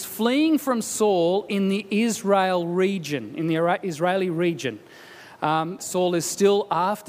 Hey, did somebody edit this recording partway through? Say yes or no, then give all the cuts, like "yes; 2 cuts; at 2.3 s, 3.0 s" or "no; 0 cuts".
yes; 1 cut; at 5.8 s